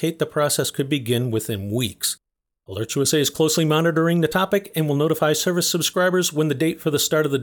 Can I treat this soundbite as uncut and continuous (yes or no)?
yes